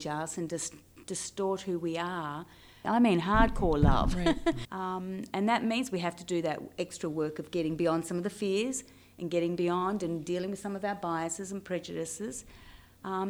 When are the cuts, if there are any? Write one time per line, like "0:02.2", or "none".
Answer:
0:02.8
0:04.6